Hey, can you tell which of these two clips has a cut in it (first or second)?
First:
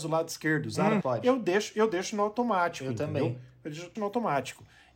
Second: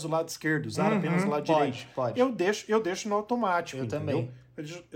first